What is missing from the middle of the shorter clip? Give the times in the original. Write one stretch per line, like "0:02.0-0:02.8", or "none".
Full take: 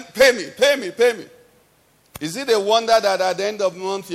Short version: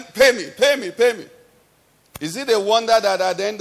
none

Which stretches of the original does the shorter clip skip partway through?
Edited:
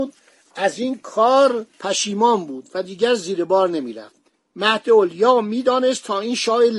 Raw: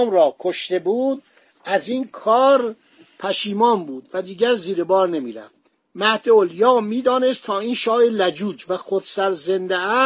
0:02.8-0:03.1

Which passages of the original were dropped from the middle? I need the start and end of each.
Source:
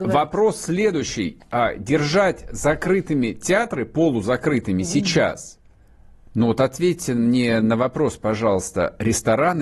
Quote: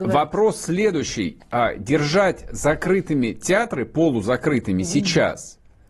none

